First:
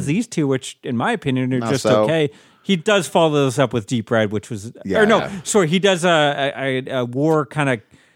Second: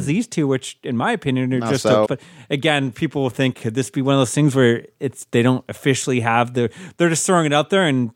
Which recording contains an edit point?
second; 2 cuts; at 2.1 s, 3.5 s

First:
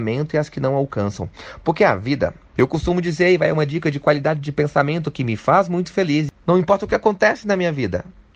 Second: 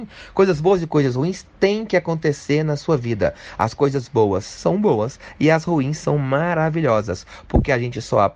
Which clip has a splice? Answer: first; 1 cut; at 2.5 s

